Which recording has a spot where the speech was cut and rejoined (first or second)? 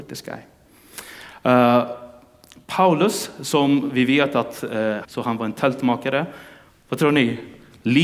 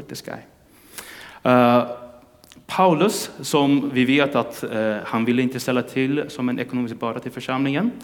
first